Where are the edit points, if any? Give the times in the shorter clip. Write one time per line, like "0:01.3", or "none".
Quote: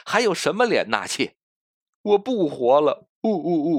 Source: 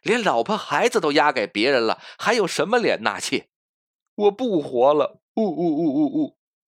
none